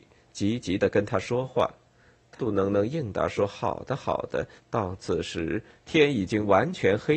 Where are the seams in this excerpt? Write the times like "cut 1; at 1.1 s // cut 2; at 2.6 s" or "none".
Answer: cut 1; at 2.4 s // cut 2; at 4.6 s